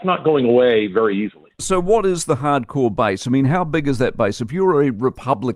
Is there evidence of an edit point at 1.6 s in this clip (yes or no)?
yes